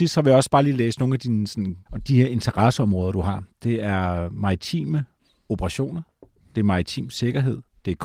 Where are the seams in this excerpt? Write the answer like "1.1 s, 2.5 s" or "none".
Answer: 1.9 s